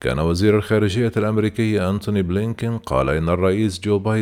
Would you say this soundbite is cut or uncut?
uncut